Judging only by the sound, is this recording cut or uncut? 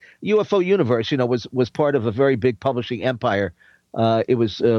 uncut